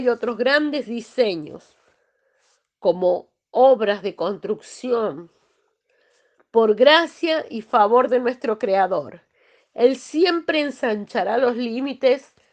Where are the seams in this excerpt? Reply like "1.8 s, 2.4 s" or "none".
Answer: none